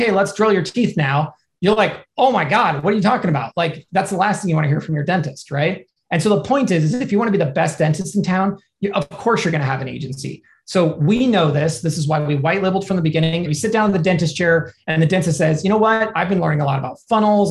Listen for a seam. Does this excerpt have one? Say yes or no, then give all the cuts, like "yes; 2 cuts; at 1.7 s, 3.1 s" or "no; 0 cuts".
yes; 1 cut; at 13.5 s